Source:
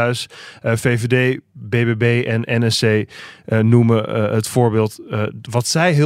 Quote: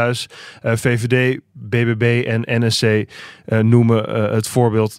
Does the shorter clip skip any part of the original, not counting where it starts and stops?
no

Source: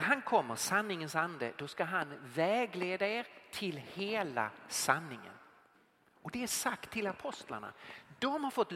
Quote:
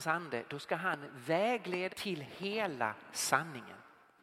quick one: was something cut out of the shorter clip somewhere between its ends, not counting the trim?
yes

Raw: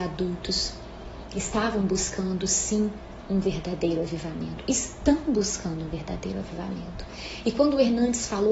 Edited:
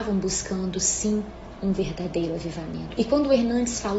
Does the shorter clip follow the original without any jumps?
no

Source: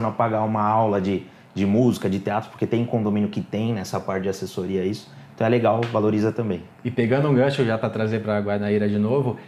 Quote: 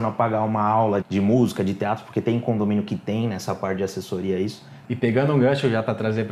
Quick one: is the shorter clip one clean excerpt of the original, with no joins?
no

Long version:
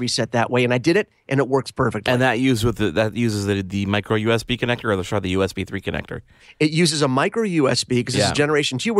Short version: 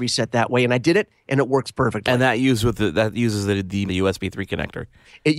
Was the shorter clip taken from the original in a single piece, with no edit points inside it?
no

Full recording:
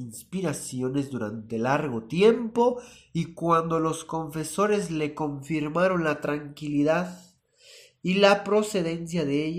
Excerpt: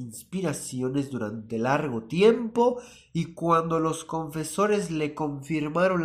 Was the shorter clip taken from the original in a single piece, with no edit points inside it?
yes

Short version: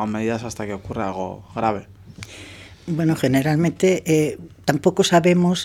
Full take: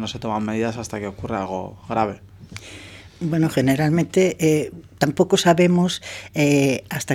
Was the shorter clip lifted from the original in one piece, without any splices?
yes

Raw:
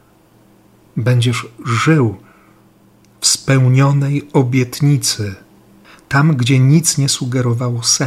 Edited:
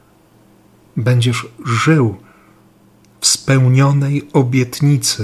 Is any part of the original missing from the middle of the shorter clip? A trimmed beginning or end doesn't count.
no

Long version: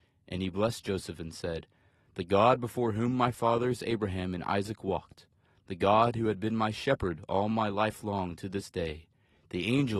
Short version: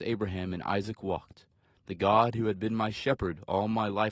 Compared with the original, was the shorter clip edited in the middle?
no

